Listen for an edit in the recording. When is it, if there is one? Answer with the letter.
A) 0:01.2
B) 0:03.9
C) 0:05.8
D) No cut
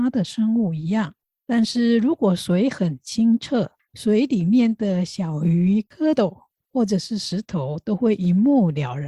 D